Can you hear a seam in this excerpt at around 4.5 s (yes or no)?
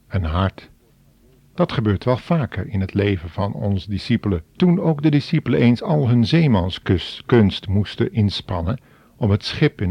yes